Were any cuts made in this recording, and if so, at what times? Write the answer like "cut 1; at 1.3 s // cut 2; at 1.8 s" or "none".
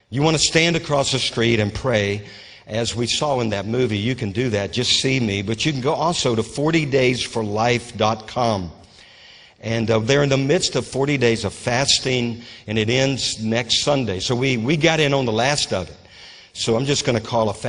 none